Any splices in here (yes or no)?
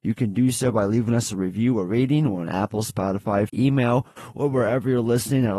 yes